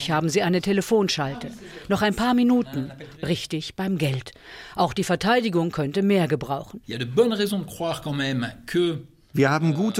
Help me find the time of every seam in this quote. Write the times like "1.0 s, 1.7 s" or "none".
3.2 s, 6.8 s

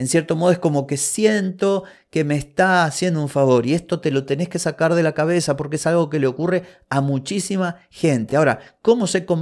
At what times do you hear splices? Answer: none

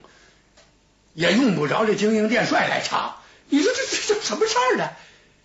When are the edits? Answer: none

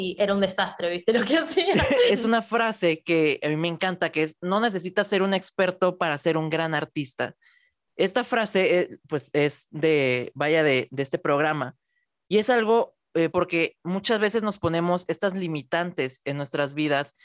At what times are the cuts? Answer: 2.1 s, 13.3 s

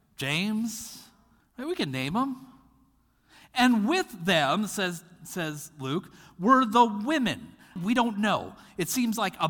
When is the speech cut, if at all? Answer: 1.4 s, 7.8 s

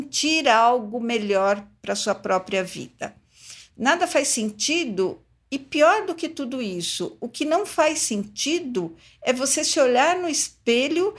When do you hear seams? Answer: 3.7 s

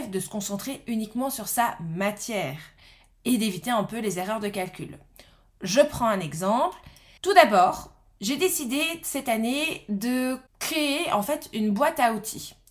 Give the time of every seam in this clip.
7.2 s

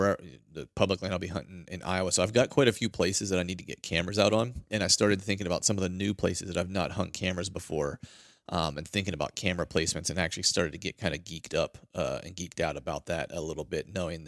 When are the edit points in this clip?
none

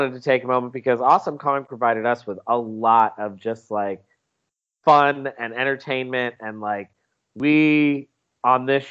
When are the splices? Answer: none

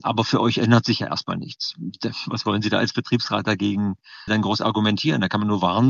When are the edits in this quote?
4.3 s

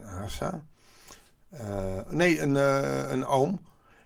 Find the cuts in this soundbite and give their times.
none

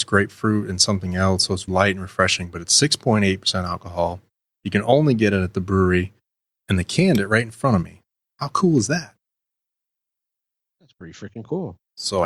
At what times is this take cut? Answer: 1.7 s

